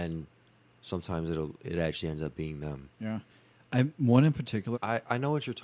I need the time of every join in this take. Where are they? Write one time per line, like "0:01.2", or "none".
0:04.7